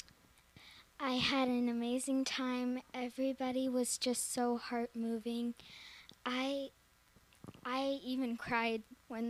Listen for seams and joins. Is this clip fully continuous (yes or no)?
yes